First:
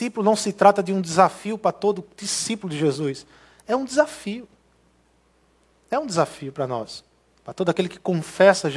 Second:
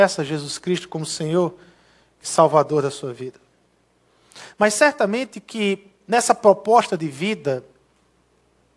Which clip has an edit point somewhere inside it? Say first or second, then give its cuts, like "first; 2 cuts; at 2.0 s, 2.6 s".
first; 1 cut; at 7.3 s